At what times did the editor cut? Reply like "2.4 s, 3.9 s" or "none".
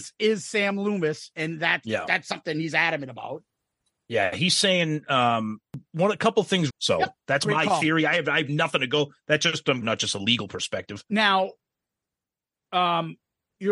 6.7 s, 9.8 s